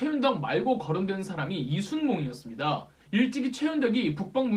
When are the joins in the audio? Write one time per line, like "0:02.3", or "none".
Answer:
0:03.0